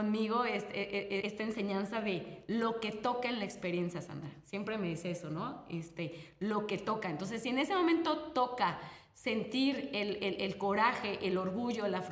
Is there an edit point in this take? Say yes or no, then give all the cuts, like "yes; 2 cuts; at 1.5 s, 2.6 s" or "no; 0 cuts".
yes; 1 cut; at 1.2 s